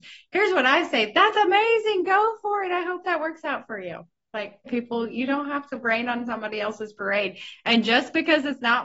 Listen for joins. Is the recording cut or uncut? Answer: cut